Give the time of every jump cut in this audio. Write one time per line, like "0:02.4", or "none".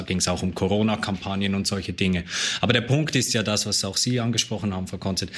none

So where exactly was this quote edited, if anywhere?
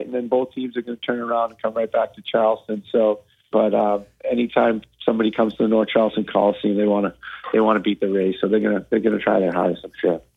0:03.5

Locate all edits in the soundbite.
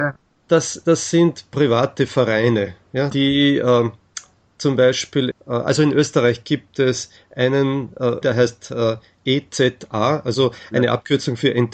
0:03.1
0:05.3
0:08.2

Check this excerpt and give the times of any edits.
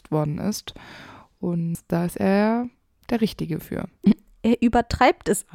0:04.0

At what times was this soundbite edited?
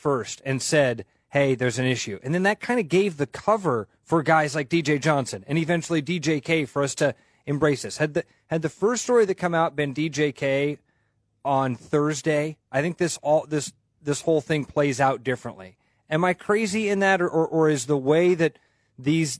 0:04.0

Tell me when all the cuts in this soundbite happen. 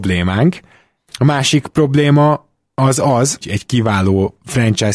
0:01.0
0:03.4

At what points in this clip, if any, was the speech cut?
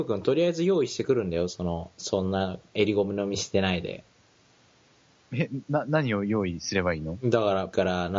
none

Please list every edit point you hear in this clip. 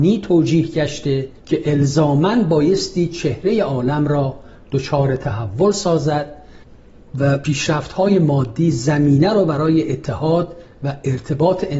0:01.4

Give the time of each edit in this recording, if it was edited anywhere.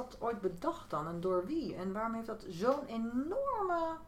none

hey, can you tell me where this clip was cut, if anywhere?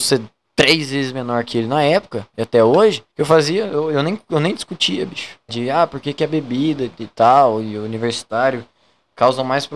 0:03.1
0:05.5

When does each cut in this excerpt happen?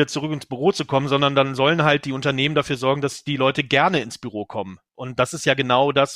0:05.2

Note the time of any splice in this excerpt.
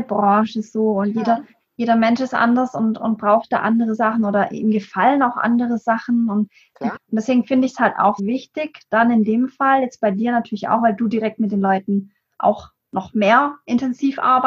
0:07.0
0:08.2

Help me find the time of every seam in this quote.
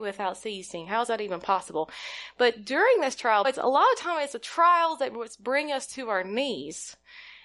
0:03.4

